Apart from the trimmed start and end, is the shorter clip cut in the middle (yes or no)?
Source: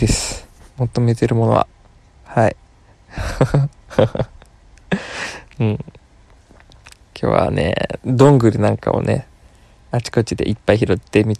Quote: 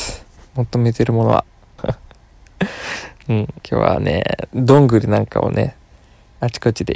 yes